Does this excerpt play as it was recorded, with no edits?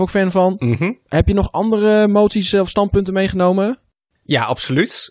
yes; 0 cuts

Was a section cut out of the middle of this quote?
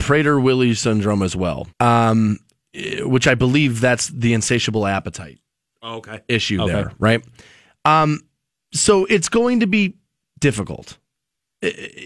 yes; 1 cut; at 1.7 s

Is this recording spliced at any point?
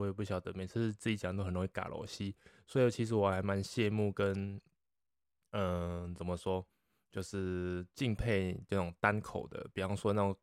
no; 0 cuts

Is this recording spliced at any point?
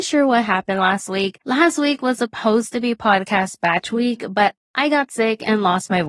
no; 0 cuts

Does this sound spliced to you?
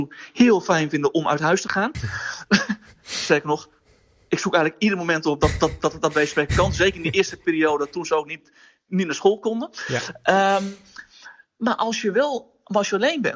no; 0 cuts

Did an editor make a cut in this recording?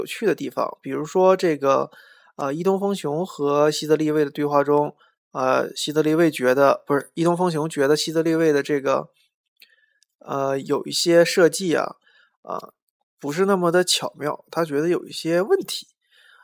no; 0 cuts

